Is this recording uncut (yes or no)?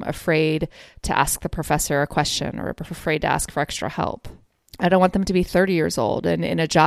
yes